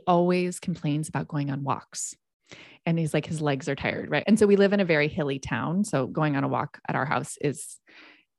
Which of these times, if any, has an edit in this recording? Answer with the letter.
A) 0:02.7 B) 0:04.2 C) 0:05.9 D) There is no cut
B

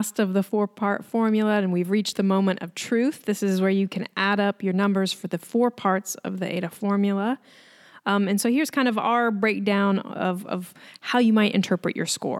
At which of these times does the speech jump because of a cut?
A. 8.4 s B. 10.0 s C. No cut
C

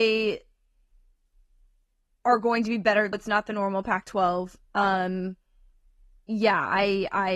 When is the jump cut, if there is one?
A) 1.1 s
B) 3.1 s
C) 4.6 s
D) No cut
B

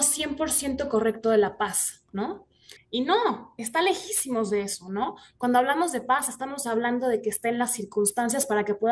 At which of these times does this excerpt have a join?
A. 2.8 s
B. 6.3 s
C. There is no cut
A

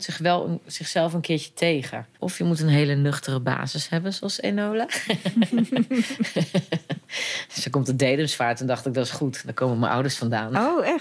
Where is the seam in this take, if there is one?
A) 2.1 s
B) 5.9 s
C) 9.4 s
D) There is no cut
A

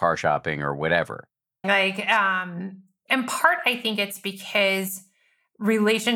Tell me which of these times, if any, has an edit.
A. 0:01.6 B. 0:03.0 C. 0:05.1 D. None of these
A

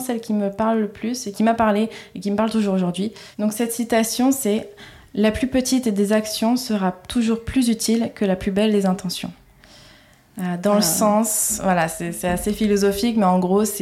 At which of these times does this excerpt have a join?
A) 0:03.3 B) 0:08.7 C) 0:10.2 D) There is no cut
D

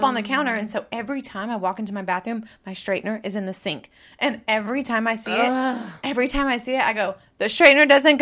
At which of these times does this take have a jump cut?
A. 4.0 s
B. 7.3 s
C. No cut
C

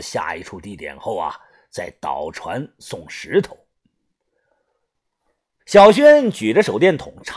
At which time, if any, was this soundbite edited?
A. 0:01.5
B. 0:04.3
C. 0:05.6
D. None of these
C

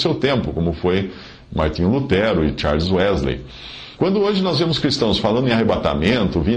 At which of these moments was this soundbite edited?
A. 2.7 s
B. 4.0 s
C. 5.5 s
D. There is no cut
B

